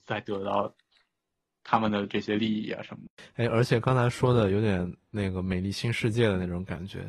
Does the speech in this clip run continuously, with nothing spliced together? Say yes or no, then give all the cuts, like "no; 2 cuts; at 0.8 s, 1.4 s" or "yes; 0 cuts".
yes; 0 cuts